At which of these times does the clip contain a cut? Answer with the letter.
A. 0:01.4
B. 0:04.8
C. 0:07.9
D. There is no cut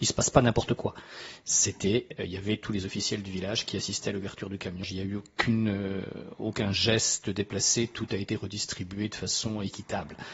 B